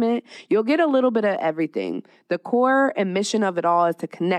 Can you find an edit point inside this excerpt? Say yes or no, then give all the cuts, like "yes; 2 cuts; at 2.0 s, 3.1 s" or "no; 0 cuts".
no; 0 cuts